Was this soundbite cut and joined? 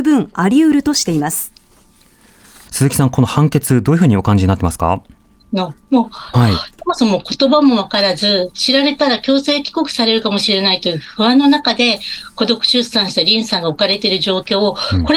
yes; 3 cuts; at 2.7 s, 6.3 s, 8.5 s

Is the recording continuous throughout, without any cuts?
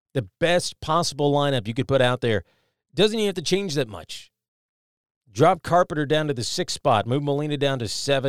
yes; 0 cuts

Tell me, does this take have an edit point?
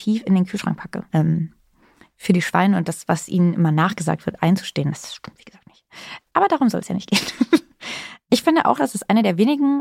yes; 1 cut; at 1.1 s

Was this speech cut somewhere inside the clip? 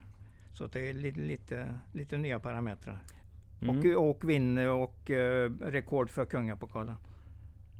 yes; 1 cut; at 3.6 s

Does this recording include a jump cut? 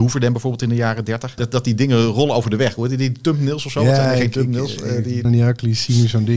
yes; 2 cuts; at 1.4 s, 5.2 s

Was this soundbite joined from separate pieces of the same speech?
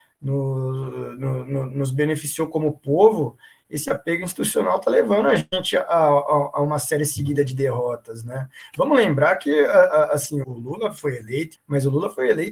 yes; 2 cuts; at 10.4 s, 11.5 s

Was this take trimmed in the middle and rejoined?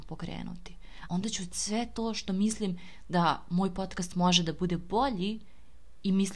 yes; 1 cut; at 1.1 s

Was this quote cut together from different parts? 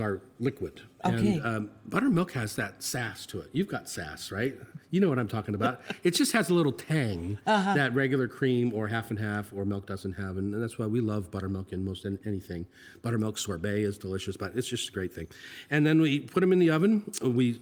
no; 0 cuts

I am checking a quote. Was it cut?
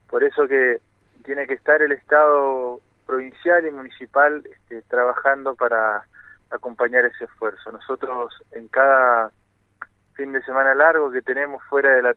no; 0 cuts

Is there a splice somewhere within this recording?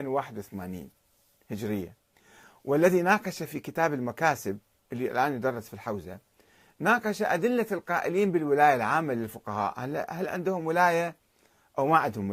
no; 0 cuts

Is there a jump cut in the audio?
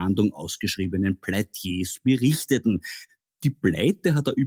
no; 0 cuts

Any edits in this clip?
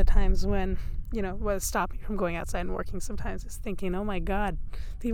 no; 0 cuts

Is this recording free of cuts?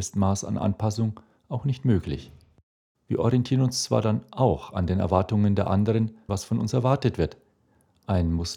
no; 2 cuts; at 2.9 s, 6.3 s

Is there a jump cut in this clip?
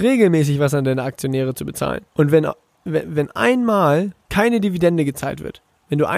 yes; 2 cuts; at 2.1 s, 4.2 s

